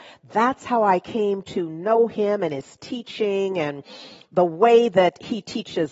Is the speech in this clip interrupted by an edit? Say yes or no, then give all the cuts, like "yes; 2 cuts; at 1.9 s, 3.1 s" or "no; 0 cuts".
no; 0 cuts